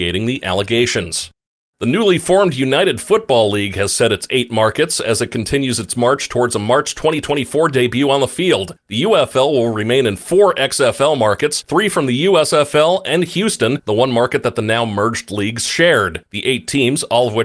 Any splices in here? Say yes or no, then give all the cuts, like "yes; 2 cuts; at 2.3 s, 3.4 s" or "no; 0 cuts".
no; 0 cuts